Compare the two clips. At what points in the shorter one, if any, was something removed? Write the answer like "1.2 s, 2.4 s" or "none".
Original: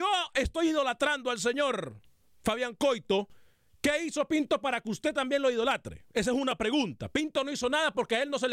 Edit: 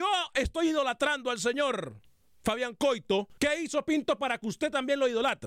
3.4 s